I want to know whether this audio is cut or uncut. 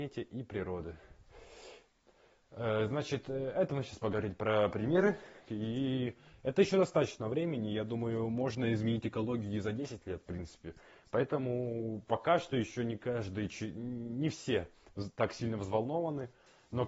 cut